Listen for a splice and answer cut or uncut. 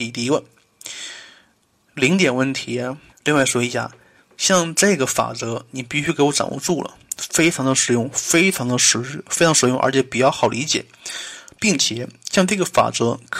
cut